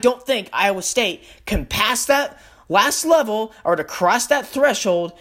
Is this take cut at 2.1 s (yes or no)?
no